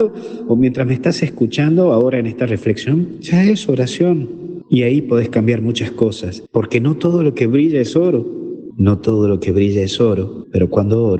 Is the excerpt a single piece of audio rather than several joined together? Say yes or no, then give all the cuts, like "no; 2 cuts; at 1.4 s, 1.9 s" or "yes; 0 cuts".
no; 2 cuts; at 6.5 s, 8.7 s